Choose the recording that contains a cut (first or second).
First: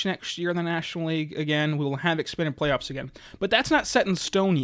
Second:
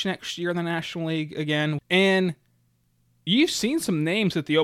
second